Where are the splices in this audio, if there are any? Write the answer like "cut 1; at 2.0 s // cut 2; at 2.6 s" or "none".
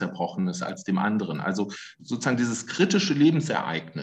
none

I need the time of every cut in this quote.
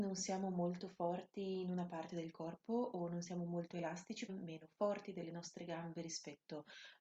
cut 1; at 4.3 s

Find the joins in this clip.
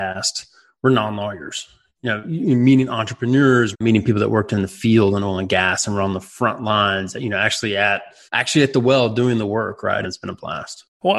cut 1; at 3.7 s // cut 2; at 8.3 s // cut 3; at 10.0 s

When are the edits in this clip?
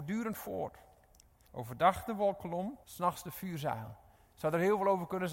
cut 1; at 1.5 s // cut 2; at 2.8 s

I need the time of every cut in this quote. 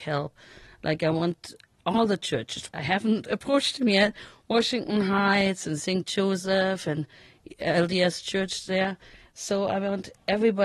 cut 1; at 2.7 s // cut 2; at 9.3 s

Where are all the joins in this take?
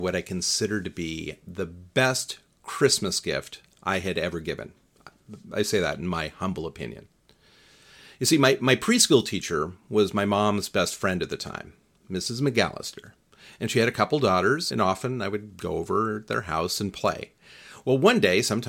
cut 1; at 14.7 s

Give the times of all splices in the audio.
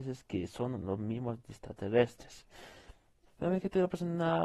cut 1; at 3.3 s

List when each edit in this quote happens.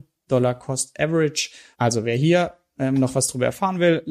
cut 1; at 1.7 s

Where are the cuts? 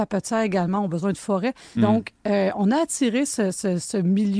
cut 1; at 1.8 s

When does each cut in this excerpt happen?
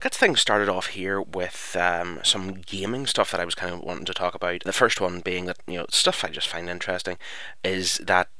cut 1; at 4.7 s

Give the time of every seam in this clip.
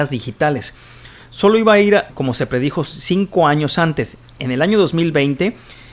cut 1; at 2.1 s

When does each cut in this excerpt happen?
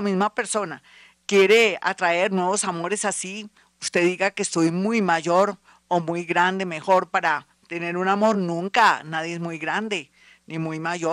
none

